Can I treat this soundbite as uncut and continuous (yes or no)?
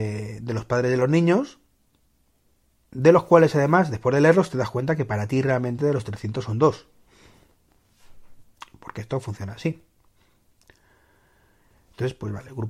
yes